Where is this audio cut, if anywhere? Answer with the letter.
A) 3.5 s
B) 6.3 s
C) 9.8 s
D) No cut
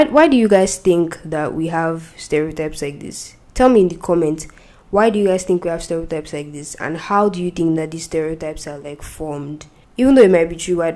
C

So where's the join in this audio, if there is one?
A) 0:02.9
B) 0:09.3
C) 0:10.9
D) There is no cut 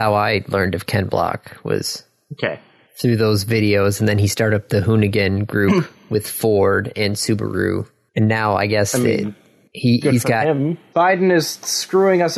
C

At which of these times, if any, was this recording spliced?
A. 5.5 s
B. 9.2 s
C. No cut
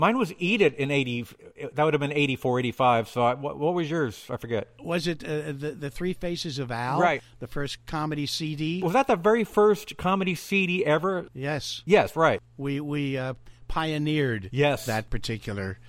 C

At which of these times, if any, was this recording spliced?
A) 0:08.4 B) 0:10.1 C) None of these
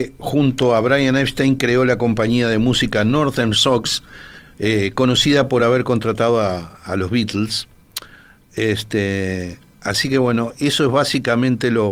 C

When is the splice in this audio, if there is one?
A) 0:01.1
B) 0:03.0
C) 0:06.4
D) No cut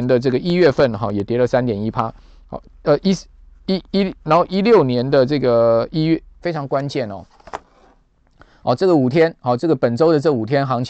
C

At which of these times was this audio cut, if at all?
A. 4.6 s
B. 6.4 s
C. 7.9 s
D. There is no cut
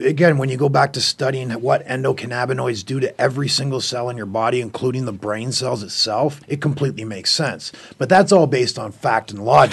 B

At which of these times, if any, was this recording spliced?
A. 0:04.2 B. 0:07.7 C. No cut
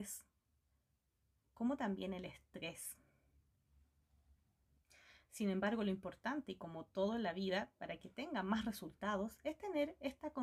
C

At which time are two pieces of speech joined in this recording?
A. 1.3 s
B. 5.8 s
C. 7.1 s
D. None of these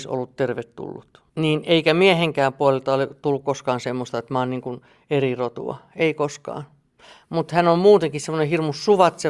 A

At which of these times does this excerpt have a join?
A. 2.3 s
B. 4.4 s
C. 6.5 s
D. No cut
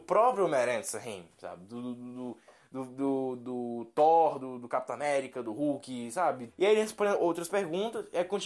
C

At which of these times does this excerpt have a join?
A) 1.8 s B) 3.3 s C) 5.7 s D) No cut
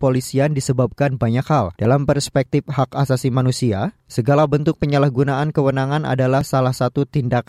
A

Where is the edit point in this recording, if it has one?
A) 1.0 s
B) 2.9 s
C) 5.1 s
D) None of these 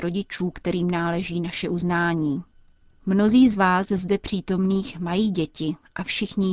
D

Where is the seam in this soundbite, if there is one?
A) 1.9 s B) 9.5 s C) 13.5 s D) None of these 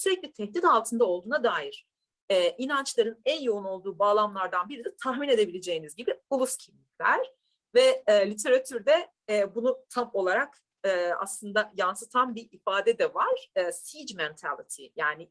D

